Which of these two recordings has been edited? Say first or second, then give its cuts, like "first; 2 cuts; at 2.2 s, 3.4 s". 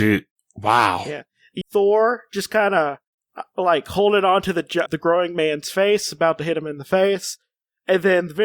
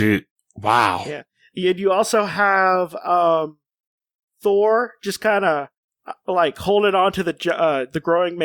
first; 2 cuts; at 1.6 s, 4.9 s